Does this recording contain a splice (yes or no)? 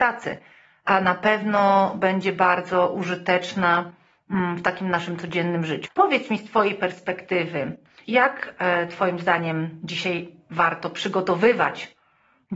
yes